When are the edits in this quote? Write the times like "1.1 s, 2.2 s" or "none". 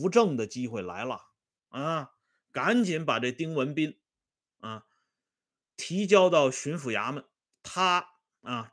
none